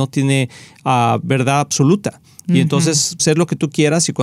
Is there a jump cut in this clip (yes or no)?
yes